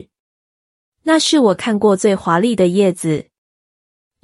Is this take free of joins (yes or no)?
yes